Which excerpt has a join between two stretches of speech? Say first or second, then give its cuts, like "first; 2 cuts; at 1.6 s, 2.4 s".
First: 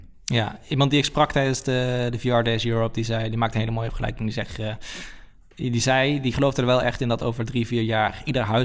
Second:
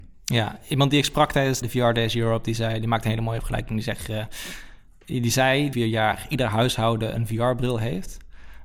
second; 2 cuts; at 1.6 s, 5.7 s